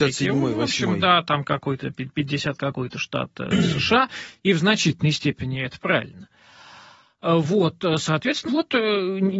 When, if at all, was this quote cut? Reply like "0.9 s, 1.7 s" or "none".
8.5 s